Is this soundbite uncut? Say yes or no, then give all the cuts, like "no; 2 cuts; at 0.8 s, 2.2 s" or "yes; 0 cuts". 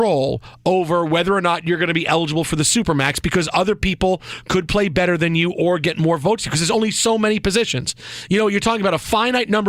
yes; 0 cuts